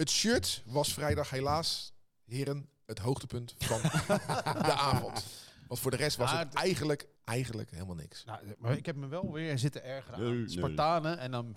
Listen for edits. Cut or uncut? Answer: cut